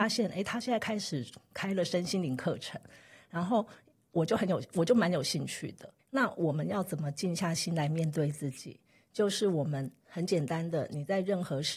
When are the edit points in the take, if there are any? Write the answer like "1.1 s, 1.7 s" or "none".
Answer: 6.0 s